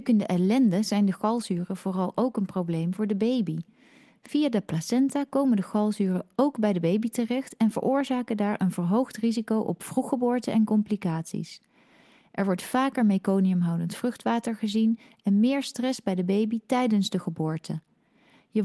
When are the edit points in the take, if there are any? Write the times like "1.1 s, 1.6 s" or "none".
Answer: none